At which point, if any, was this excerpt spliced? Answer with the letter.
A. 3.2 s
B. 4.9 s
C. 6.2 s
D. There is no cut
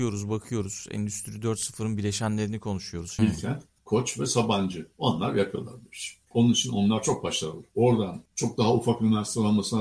A